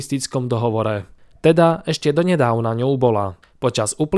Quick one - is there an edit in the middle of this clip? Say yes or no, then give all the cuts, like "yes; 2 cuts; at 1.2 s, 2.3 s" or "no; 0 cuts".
no; 0 cuts